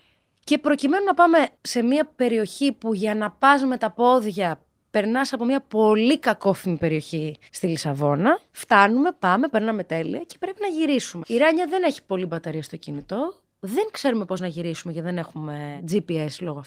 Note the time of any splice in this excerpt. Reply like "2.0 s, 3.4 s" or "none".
7.5 s, 11.2 s